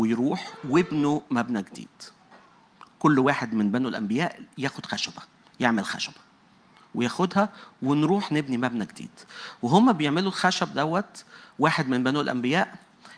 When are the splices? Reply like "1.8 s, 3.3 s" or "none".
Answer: none